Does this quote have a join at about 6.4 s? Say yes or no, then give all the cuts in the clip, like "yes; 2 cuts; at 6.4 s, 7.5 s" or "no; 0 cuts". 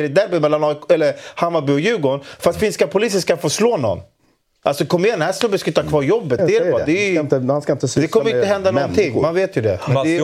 yes; 1 cut; at 6.4 s